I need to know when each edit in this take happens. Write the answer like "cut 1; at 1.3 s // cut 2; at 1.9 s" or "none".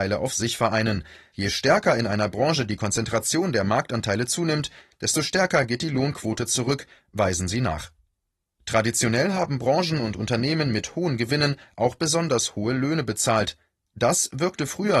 cut 1; at 1.3 s